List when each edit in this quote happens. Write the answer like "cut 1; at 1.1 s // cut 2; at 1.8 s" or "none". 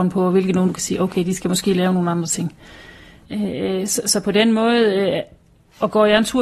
cut 1; at 3.3 s